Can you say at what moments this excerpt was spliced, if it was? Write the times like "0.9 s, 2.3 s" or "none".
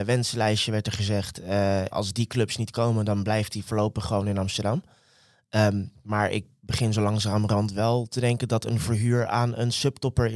1.9 s